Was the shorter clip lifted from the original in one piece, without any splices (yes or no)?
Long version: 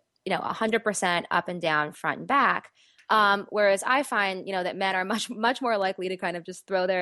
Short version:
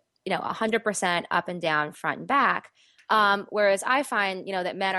yes